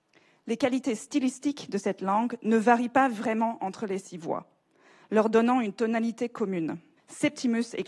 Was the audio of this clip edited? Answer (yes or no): yes